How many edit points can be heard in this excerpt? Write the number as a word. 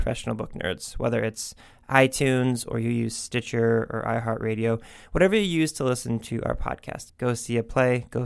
one